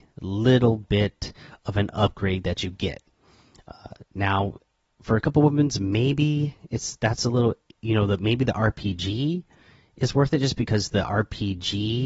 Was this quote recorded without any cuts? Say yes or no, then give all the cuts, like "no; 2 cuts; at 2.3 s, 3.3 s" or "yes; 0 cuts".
yes; 0 cuts